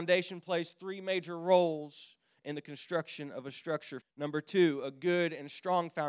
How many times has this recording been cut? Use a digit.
1